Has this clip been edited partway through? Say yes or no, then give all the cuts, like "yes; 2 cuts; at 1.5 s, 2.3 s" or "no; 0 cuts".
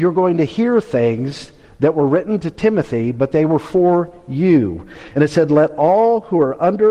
no; 0 cuts